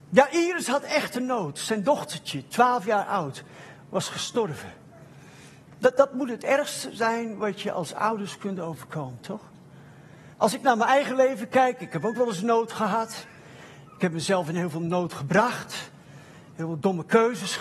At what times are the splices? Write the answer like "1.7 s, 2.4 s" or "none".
10.3 s